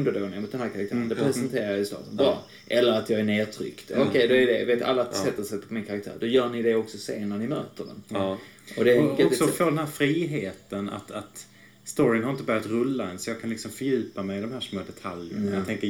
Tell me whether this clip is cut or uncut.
uncut